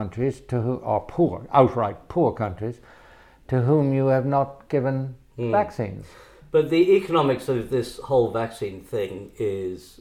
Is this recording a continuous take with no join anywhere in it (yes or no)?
yes